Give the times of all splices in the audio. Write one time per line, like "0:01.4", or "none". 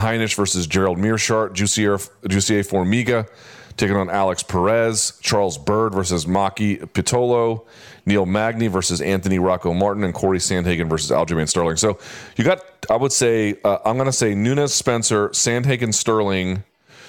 none